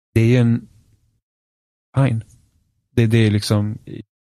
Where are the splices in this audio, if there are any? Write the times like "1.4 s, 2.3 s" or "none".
1.9 s

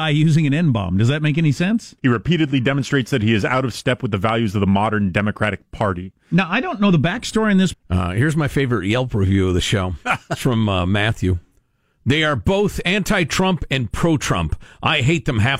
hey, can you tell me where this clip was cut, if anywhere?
2.0 s, 7.7 s

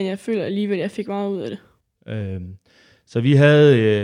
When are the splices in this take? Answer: 1.9 s

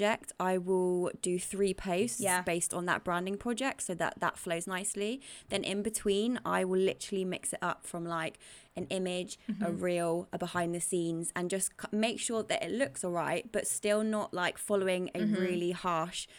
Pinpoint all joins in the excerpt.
none

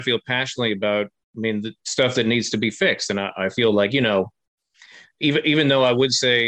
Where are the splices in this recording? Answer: none

